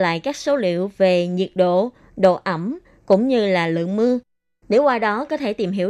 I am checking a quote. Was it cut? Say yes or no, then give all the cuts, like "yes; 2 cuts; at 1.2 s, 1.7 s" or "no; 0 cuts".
no; 0 cuts